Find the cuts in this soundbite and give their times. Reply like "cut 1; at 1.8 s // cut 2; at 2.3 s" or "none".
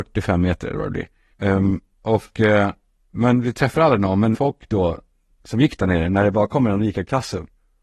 cut 1; at 1.3 s // cut 2; at 4.3 s